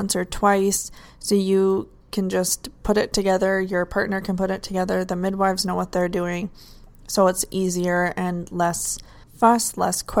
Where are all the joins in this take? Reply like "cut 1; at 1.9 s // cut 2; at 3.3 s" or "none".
none

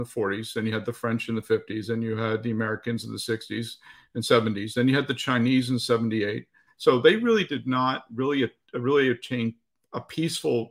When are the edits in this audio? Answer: cut 1; at 6.7 s

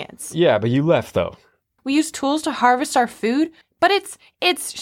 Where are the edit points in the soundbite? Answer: cut 1; at 1.8 s // cut 2; at 3.6 s

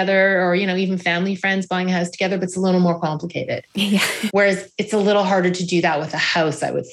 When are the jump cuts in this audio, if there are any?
cut 1; at 4.3 s

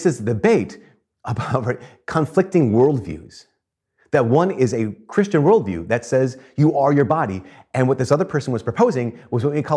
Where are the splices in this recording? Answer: none

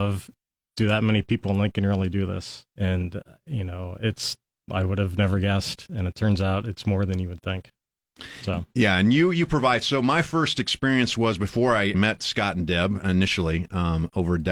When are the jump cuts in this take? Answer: cut 1; at 2.7 s // cut 2; at 11.9 s

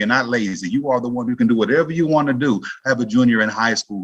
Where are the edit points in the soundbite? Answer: cut 1; at 2.8 s

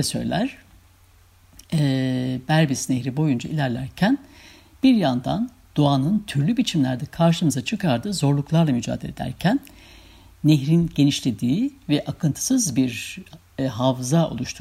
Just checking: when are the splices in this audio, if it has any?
none

